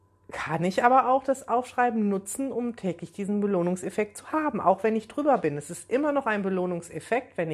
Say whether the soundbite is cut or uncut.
uncut